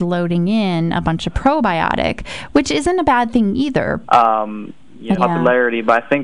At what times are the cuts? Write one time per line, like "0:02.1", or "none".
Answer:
0:04.0
0:05.2